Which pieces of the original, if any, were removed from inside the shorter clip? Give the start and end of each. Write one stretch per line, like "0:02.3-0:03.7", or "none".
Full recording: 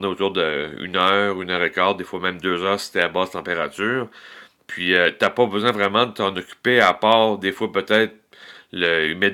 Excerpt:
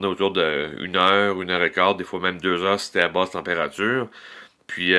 none